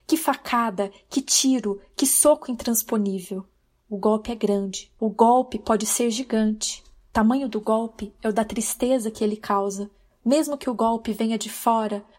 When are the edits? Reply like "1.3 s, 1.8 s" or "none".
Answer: none